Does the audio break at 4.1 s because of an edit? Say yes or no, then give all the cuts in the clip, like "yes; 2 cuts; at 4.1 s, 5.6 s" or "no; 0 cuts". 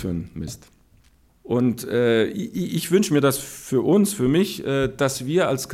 no; 1 cut; at 1.3 s